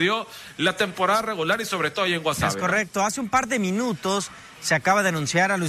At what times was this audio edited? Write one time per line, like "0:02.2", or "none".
none